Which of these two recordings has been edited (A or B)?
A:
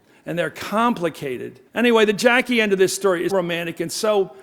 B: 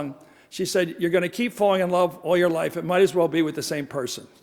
A